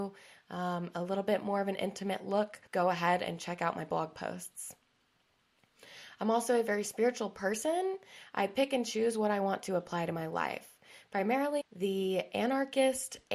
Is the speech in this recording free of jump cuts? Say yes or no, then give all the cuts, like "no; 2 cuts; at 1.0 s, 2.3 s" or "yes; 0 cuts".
no; 2 cuts; at 2.7 s, 11.6 s